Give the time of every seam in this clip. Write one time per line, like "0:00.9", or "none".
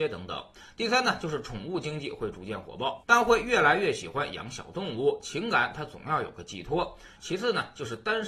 0:03.0
0:07.2